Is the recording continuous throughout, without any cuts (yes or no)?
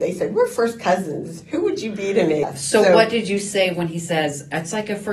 yes